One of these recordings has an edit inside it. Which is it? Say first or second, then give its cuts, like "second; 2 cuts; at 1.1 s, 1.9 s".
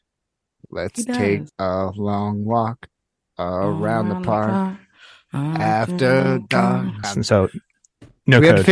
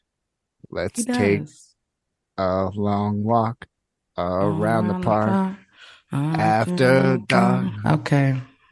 first; 2 cuts; at 1.5 s, 7.0 s